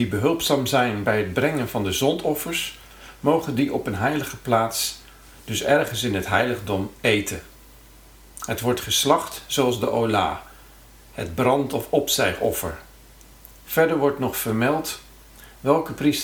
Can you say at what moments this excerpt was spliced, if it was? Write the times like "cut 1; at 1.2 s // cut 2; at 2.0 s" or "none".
cut 1; at 13.6 s